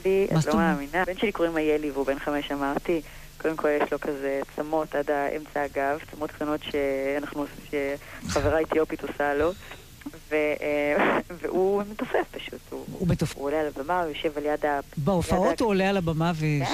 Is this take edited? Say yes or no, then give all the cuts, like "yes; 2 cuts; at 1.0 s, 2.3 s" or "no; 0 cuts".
yes; 2 cuts; at 1.0 s, 13.3 s